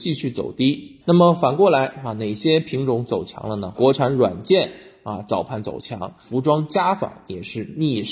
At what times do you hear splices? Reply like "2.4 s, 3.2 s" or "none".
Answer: 1.0 s, 3.7 s, 6.2 s